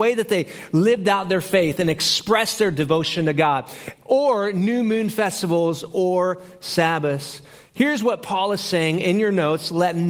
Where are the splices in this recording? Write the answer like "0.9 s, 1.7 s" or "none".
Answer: none